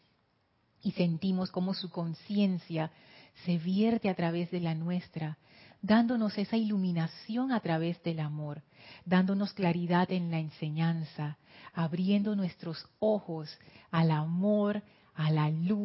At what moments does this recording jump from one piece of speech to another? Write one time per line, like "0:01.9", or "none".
none